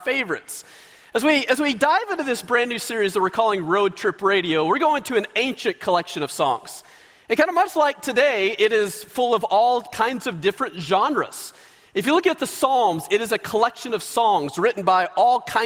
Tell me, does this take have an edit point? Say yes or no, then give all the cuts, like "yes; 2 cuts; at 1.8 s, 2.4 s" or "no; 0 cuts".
no; 0 cuts